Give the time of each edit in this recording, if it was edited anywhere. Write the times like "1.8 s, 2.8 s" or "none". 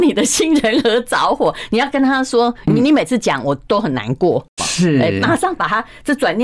4.6 s